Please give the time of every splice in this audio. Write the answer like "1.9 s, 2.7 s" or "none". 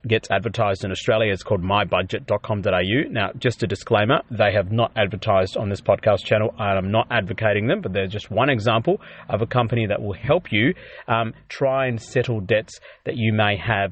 none